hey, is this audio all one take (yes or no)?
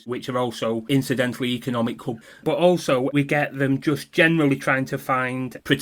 yes